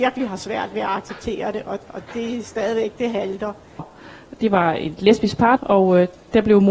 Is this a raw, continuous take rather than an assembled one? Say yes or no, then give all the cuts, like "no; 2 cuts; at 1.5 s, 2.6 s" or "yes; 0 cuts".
no; 2 cuts; at 3.8 s, 5.6 s